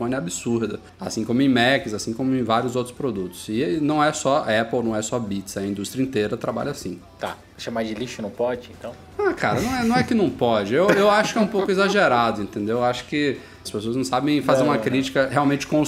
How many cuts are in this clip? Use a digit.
1